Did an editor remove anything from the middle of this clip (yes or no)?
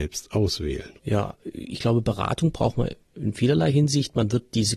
no